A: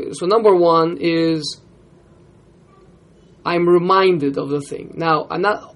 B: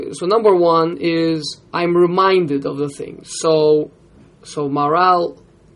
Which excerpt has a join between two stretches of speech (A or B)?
B